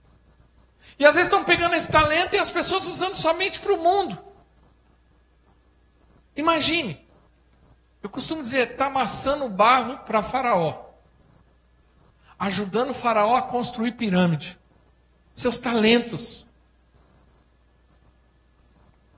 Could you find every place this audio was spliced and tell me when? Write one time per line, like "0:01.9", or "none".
0:15.2

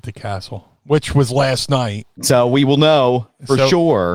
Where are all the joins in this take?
0:02.2

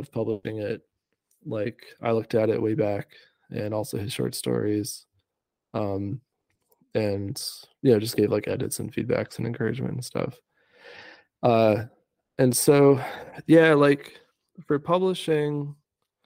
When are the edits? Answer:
none

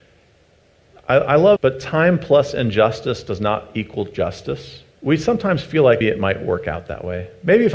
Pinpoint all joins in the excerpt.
0:01.6
0:04.9
0:06.0

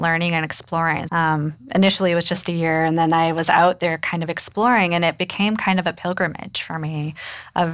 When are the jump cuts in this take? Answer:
0:01.1

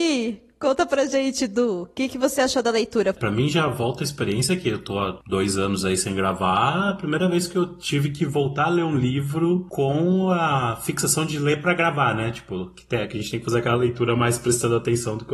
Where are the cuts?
0:03.1

